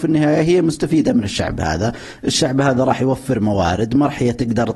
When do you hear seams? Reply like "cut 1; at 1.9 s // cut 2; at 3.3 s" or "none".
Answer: none